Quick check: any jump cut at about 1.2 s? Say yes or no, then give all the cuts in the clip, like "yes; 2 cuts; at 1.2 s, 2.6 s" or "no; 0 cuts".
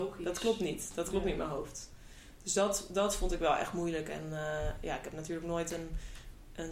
no; 0 cuts